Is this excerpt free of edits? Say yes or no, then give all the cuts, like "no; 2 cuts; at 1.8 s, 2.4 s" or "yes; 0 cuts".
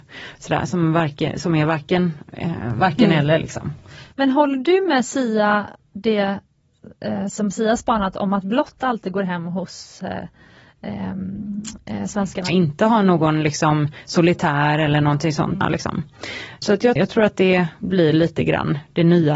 no; 3 cuts; at 12.5 s, 15.6 s, 17.0 s